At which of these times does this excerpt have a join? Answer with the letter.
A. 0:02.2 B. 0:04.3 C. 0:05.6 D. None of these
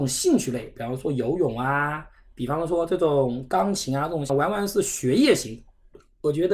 B